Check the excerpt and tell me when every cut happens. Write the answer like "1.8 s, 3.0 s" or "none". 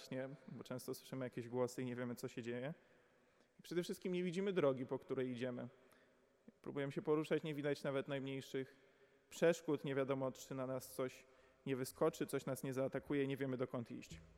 none